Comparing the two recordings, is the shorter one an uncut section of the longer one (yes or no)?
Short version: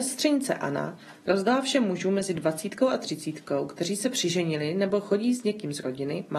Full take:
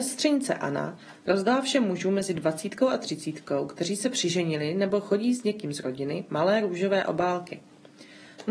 yes